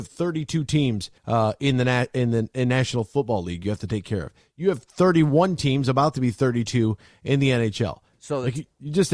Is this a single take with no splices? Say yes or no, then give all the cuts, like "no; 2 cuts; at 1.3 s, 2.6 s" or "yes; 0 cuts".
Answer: no; 2 cuts; at 1.2 s, 8.1 s